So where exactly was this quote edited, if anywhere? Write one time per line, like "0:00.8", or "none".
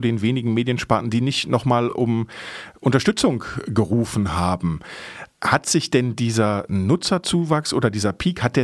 none